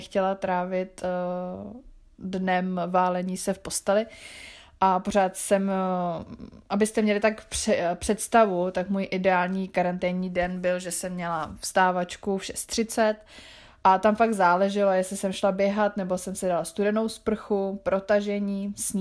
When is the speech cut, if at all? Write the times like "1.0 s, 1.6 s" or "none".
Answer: none